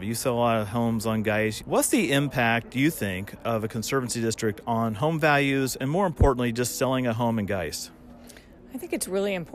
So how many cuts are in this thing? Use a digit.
1